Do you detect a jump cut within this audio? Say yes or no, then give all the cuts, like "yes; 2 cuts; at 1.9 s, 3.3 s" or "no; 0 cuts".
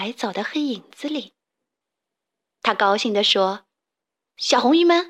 no; 0 cuts